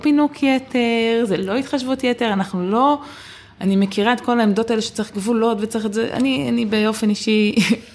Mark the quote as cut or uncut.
uncut